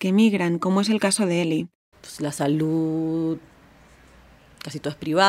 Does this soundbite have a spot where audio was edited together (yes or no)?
yes